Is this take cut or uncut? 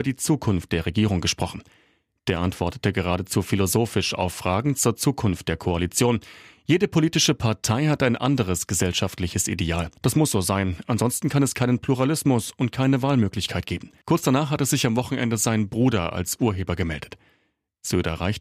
cut